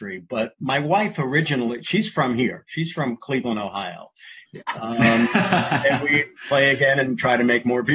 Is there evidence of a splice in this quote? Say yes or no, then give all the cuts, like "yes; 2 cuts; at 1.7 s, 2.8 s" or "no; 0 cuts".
yes; 1 cut; at 4.5 s